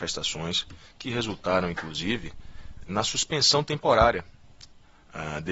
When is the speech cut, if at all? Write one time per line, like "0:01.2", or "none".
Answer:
0:02.9